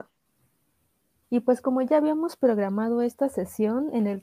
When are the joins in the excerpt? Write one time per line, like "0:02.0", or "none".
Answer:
0:01.2